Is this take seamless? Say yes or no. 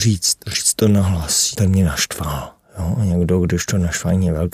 no